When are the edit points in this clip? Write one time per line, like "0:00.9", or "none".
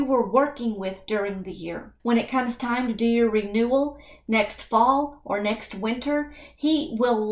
0:02.0